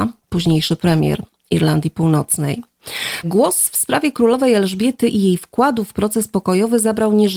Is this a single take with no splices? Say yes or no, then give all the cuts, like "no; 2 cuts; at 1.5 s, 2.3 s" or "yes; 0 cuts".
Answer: no; 1 cut; at 3.2 s